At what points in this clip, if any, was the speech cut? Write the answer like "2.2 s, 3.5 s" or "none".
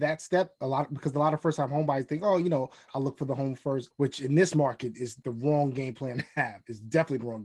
2.9 s, 3.9 s, 5.2 s